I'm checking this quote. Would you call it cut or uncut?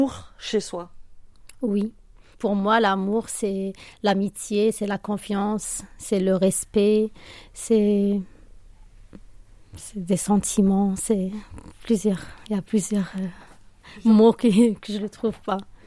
uncut